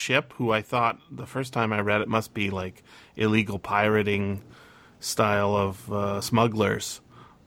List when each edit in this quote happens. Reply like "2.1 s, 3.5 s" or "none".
none